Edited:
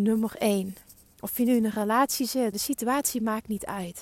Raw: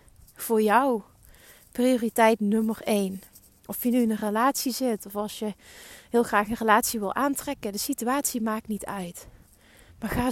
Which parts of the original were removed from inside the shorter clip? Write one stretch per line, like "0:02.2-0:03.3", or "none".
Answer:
0:05.0-0:07.7

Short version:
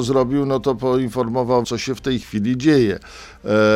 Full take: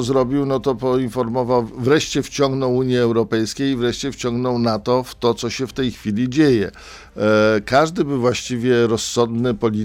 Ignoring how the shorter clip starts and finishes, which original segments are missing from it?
0:01.6-0:05.4

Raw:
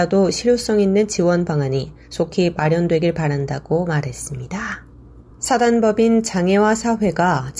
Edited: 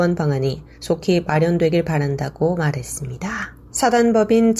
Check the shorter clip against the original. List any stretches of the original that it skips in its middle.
0:05.0-0:05.3

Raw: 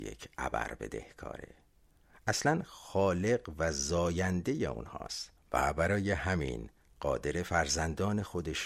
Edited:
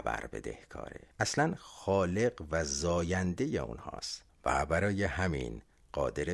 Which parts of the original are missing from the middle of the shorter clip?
0:01.6-0:02.2

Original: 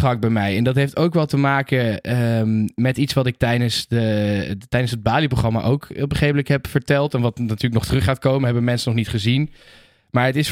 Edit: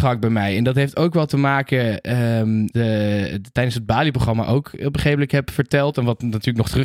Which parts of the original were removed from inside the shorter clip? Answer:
0:02.7-0:03.9

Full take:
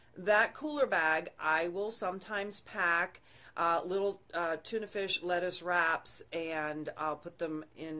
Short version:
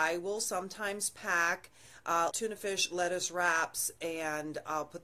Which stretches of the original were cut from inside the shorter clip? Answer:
0:03.8-0:04.6

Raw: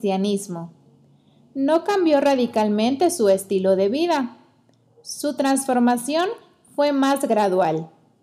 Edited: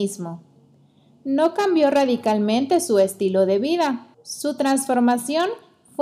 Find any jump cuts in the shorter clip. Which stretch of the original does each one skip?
0:04.4-0:04.9

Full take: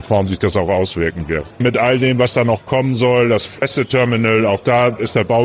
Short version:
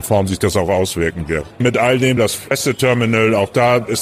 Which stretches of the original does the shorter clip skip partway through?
0:02.2-0:03.3

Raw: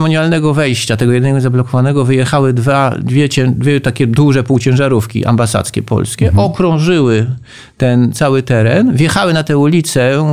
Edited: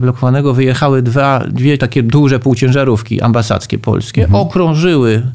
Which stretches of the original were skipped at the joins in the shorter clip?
0:03.3-0:03.8

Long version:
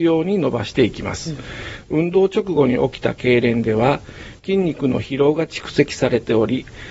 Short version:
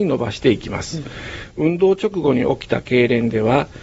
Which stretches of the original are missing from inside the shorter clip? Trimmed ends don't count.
none

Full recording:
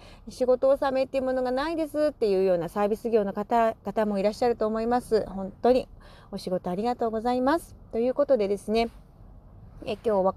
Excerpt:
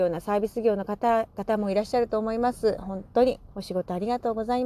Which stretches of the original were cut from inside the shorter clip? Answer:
0:06.0-0:06.3

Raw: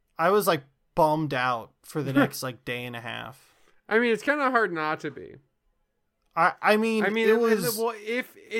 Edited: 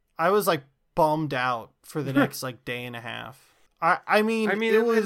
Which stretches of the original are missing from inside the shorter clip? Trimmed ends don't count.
0:03.7-0:06.2

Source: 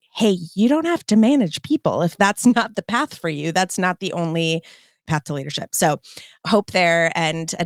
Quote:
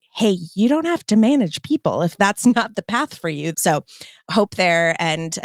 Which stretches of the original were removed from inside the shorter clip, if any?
0:03.5-0:05.7

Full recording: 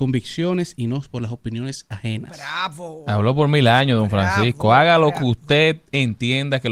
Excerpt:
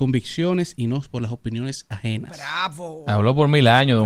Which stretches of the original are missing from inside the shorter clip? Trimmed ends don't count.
none

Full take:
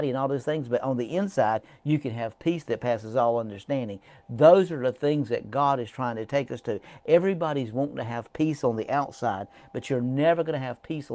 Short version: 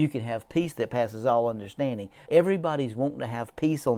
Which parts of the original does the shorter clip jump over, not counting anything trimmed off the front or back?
0:04.2-0:07.0

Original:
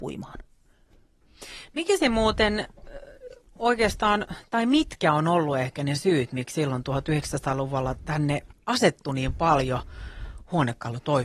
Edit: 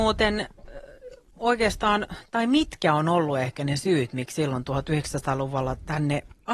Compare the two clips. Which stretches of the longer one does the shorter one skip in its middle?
none

